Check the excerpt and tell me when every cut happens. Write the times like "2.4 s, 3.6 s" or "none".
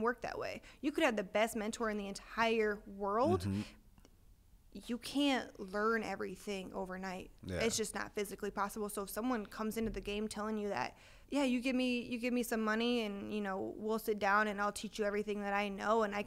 11.2 s